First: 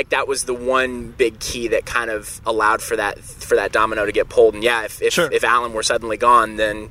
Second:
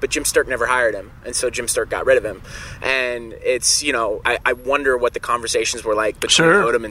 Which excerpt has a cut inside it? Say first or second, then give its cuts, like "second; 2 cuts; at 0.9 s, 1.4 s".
second; 1 cut; at 4.2 s